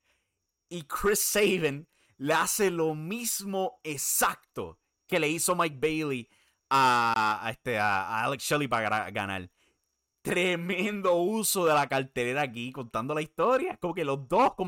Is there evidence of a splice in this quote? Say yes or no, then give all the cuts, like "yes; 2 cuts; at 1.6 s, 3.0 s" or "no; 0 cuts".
no; 0 cuts